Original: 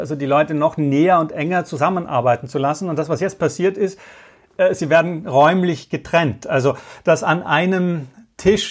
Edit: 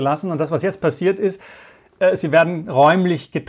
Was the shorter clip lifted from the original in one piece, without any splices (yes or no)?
yes